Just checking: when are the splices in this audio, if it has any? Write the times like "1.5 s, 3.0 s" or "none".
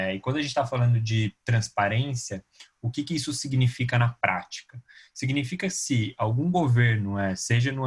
none